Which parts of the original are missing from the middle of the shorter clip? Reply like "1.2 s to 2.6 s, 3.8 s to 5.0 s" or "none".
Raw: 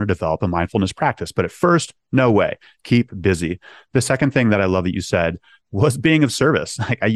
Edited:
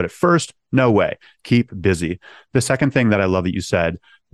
none